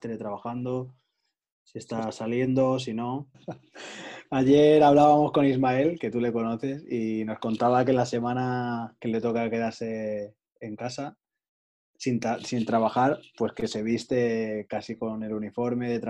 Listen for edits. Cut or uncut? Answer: cut